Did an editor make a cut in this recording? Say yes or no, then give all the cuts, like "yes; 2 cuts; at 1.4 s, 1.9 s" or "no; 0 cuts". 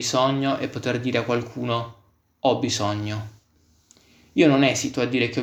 no; 0 cuts